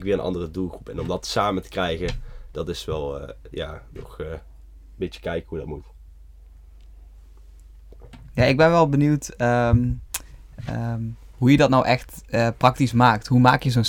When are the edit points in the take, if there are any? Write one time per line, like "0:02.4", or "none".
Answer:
none

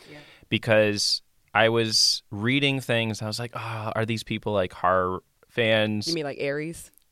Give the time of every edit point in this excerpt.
none

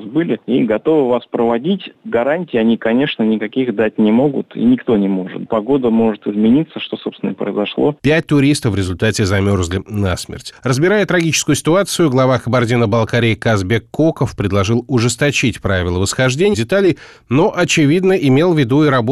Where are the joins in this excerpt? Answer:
0:08.0
0:16.5

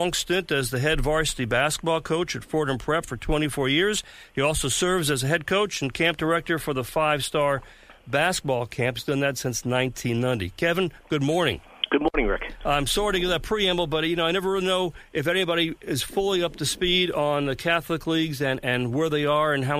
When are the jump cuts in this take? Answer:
none

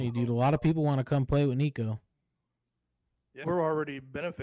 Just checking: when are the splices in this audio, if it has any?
0:03.4

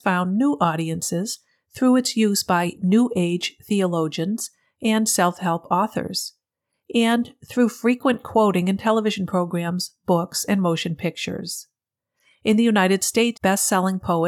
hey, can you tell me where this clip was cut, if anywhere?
0:13.3

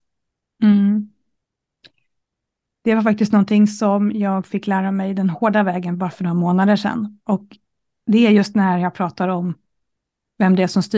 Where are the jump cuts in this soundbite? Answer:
none

